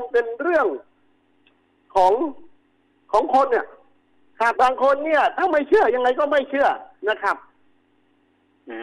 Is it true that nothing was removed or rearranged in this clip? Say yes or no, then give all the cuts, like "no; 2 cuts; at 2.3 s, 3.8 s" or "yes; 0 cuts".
no; 1 cut; at 4.5 s